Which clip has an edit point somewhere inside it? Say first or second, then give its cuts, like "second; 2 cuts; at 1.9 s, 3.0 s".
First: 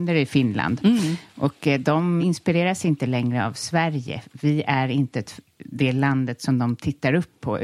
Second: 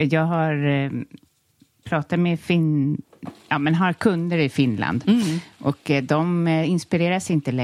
first; 1 cut; at 2.2 s